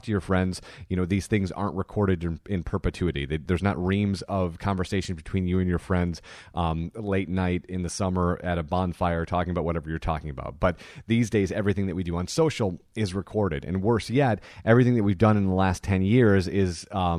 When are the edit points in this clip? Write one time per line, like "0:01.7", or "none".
none